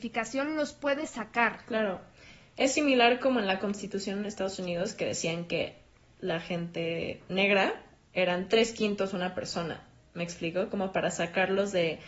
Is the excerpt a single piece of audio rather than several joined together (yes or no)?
yes